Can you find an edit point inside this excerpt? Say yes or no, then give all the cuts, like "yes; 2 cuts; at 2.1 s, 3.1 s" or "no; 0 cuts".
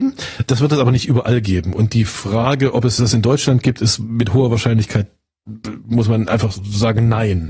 no; 0 cuts